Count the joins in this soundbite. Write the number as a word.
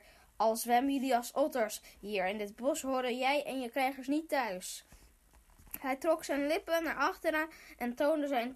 zero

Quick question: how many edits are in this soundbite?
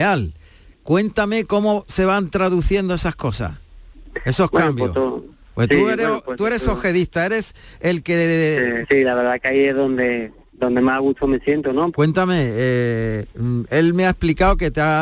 two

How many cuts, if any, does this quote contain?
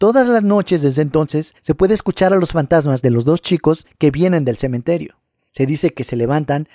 zero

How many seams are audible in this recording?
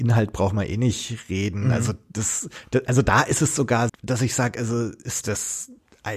two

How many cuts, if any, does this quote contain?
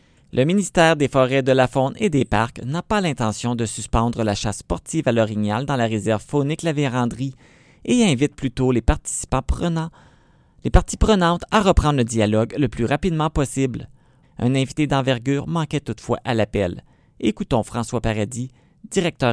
one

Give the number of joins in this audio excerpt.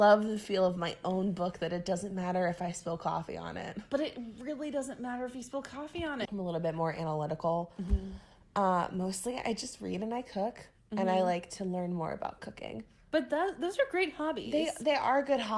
one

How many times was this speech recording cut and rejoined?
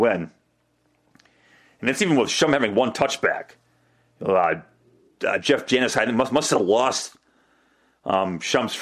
zero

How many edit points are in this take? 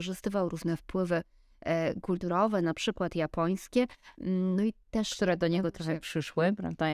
zero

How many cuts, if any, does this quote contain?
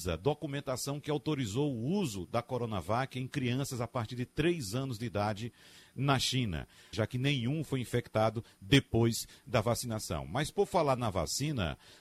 one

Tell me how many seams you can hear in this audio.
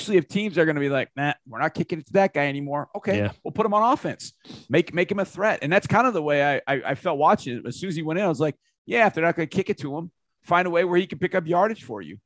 zero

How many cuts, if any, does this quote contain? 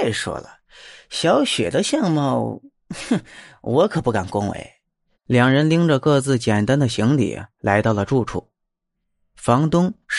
one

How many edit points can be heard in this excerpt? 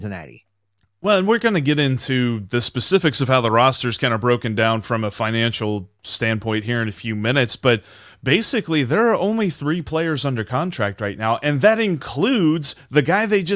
zero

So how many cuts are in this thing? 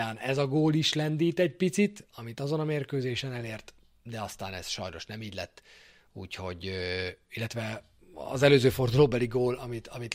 zero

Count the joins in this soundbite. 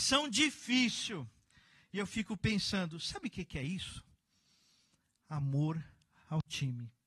zero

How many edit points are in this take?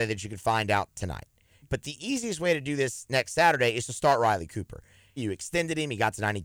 two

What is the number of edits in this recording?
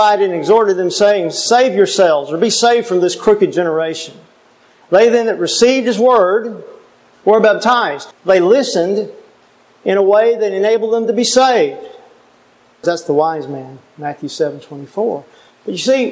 two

